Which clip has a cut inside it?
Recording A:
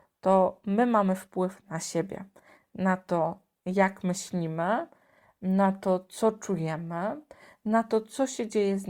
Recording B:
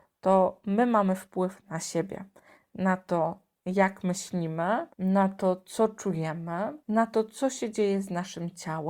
B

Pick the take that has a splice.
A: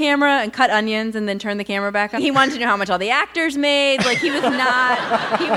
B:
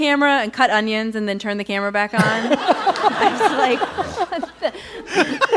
A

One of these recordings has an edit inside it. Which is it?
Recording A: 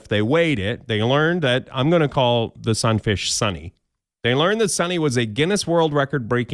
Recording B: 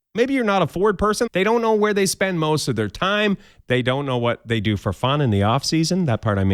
B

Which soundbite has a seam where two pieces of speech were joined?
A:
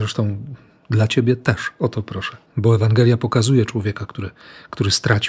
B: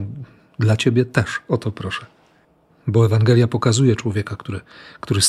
A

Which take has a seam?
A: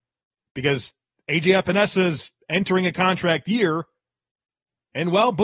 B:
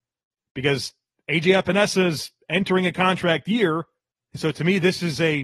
B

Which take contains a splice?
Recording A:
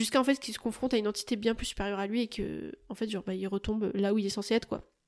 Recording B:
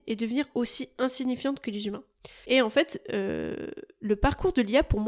B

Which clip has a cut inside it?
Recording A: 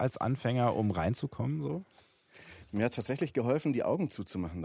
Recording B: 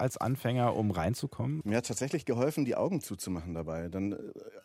B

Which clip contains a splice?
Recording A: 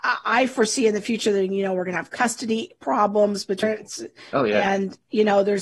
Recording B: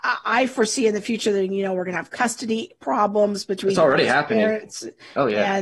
A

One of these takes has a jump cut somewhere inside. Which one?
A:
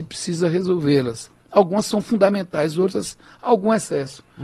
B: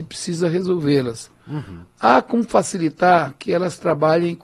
B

